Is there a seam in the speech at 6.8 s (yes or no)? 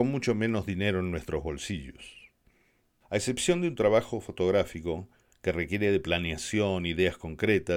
no